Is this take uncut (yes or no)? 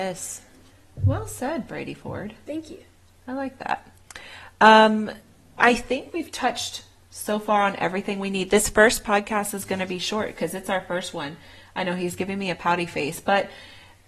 no